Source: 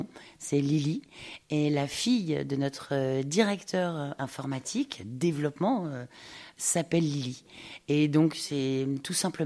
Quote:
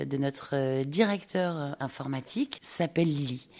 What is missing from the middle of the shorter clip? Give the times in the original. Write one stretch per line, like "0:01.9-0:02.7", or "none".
0:05.0-0:06.5